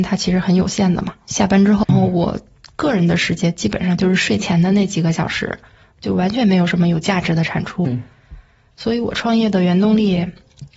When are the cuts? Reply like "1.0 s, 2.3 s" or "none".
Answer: 1.8 s